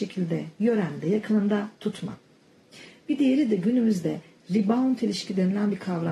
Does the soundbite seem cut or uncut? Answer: uncut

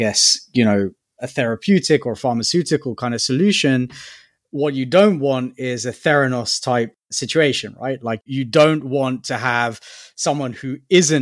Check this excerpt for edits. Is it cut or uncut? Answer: uncut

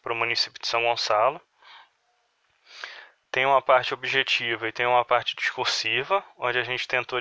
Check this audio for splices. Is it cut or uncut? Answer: cut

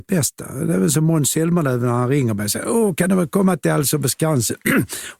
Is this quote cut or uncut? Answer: uncut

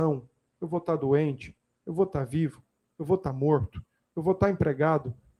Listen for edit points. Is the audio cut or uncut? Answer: uncut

